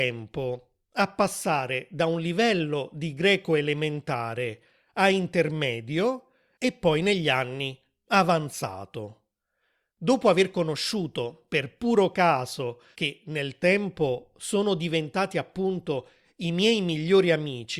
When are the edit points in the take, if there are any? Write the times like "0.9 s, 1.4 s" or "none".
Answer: 9.9 s, 12.9 s